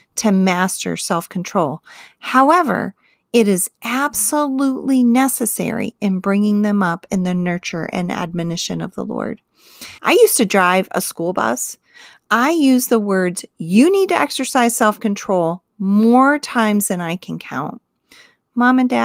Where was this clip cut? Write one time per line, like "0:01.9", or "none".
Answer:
0:10.0